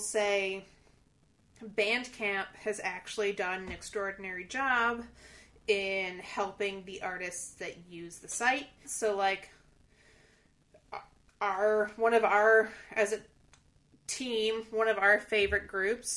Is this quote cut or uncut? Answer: cut